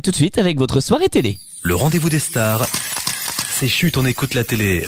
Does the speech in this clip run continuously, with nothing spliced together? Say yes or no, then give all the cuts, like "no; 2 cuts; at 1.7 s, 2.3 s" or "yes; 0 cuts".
yes; 0 cuts